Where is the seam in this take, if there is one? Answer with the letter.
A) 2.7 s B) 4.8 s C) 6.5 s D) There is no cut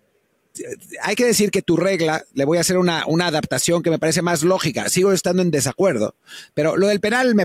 D